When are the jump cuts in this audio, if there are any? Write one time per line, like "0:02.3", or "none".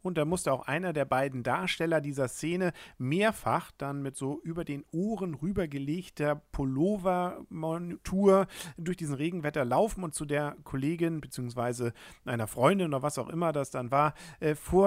none